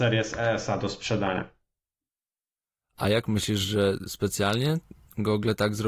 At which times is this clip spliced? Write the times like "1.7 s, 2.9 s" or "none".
none